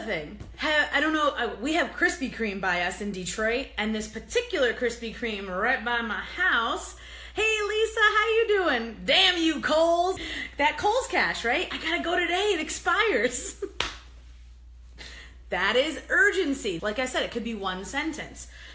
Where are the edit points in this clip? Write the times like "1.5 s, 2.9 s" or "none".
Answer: 10.2 s, 16.8 s

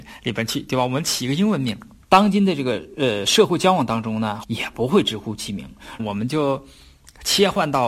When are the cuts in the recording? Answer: 2.0 s, 4.4 s, 6.0 s

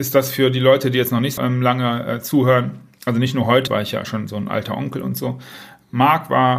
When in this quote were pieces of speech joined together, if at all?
1.4 s, 3.7 s

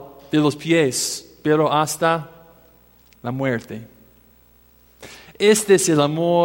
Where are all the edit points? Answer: none

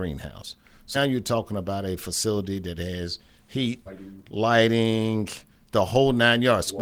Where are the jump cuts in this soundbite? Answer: 0.9 s, 3.9 s

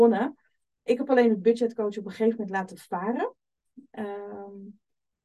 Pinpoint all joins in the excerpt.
none

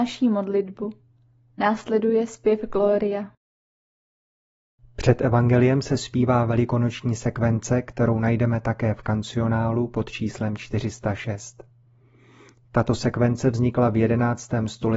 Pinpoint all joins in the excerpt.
none

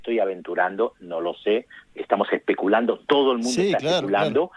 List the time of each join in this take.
1.9 s

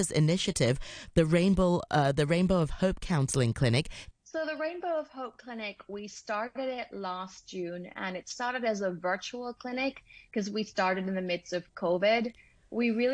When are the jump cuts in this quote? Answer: 4.1 s

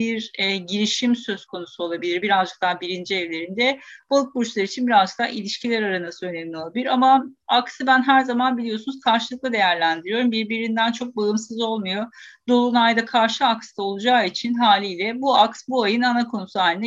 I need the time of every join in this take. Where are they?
none

